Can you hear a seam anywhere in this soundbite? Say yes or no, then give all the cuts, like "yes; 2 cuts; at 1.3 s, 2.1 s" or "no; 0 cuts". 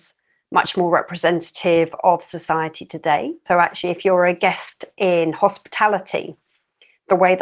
yes; 1 cut; at 3.5 s